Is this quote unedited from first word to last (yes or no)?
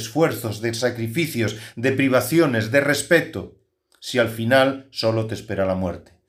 yes